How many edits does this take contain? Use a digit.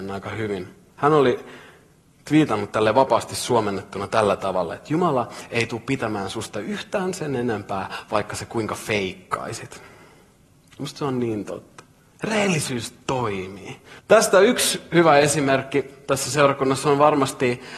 2